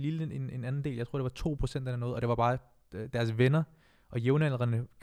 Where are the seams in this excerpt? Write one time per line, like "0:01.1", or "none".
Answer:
none